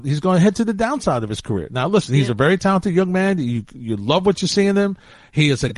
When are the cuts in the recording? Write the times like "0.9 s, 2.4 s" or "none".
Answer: none

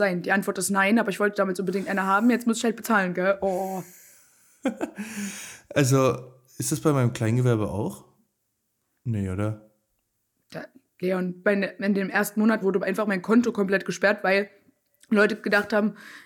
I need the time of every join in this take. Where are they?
11.4 s, 12.6 s

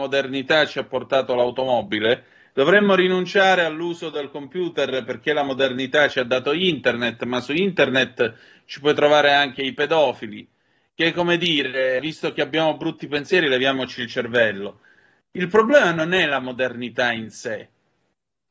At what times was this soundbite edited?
12.0 s

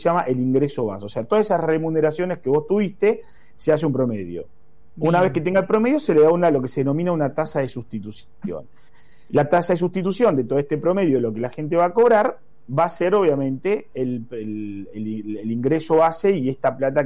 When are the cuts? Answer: none

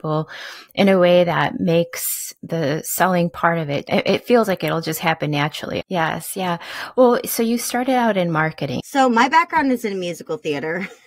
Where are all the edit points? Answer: 5.8 s, 8.8 s

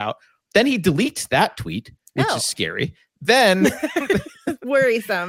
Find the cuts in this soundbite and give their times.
none

